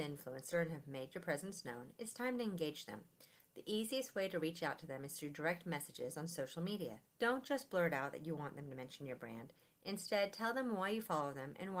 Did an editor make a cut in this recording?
no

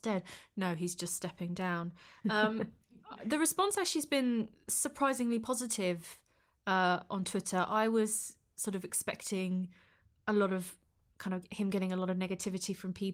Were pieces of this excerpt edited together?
no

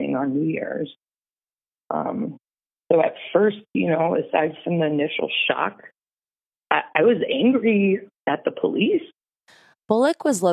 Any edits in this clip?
no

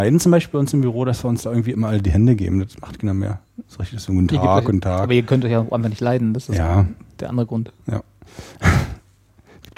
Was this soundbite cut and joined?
no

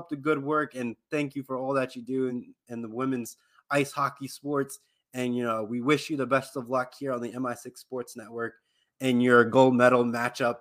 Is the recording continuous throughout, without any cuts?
yes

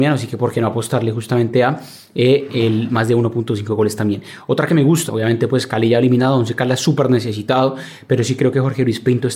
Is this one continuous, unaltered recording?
no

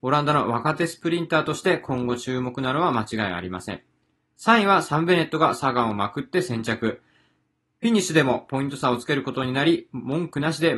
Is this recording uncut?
yes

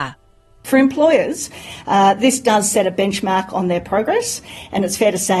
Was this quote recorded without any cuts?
yes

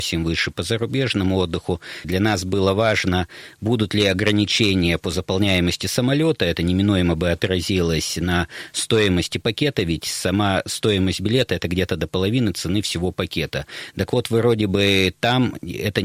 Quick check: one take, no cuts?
no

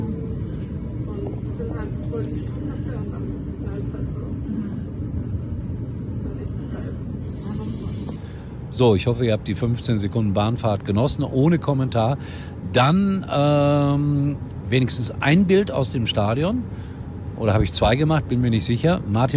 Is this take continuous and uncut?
yes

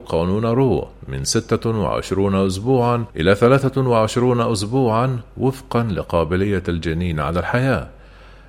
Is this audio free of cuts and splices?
no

